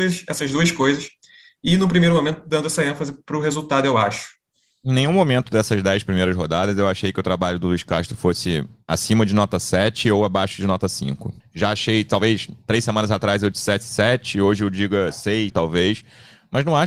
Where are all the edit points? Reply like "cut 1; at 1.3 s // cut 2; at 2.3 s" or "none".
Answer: cut 1; at 11.4 s // cut 2; at 15.5 s

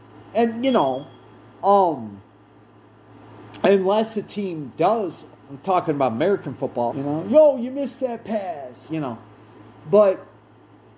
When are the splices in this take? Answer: cut 1; at 5.3 s // cut 2; at 6.9 s // cut 3; at 8.9 s

